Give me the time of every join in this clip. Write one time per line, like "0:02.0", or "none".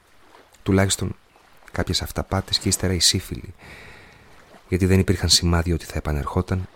none